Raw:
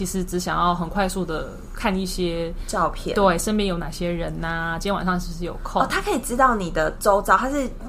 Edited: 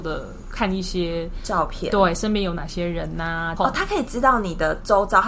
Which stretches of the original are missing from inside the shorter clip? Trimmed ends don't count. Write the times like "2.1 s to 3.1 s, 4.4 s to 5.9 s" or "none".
4.8 s to 5.7 s

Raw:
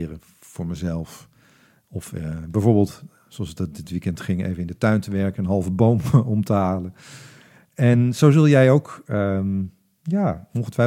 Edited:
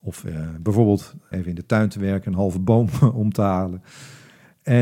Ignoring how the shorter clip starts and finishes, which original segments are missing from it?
3.2 s to 4.4 s

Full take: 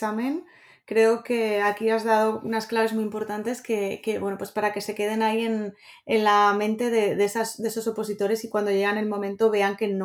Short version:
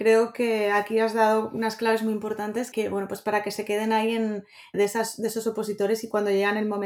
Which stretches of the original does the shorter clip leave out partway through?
3.6 s to 4.0 s, 6.0 s to 7.1 s

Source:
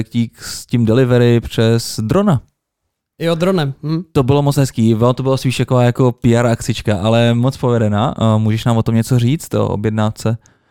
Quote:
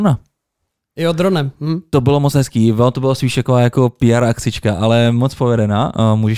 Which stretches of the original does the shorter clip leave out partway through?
none

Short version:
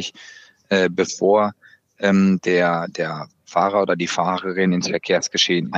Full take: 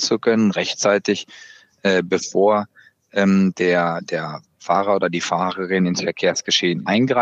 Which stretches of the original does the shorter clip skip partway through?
none

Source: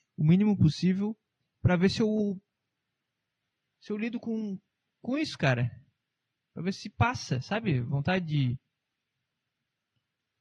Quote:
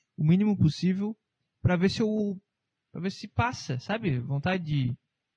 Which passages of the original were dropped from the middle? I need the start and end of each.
2.8 s to 6.5 s

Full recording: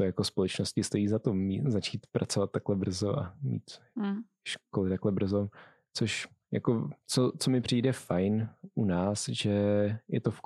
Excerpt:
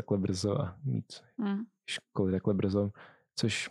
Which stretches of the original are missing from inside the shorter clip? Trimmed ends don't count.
none

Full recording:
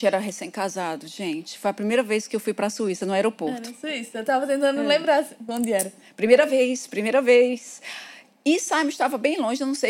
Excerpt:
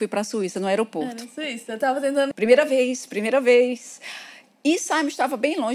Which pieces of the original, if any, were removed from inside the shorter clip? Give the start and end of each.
4.8 s to 6.1 s

